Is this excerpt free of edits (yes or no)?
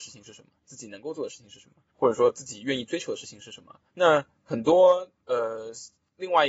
no